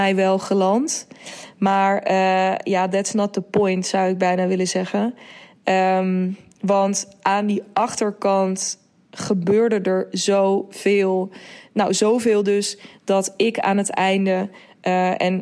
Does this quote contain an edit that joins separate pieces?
no; 0 cuts

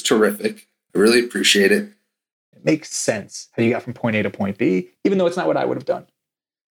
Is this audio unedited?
no; 1 cut; at 2.5 s

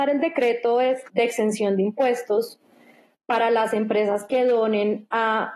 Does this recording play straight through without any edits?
no; 1 cut; at 1.1 s

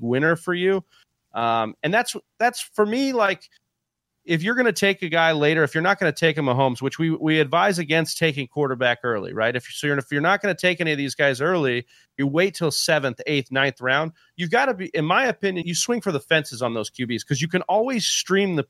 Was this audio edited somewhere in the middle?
yes; 1 cut; at 15.6 s

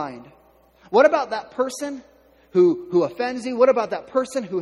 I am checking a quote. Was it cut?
no; 0 cuts

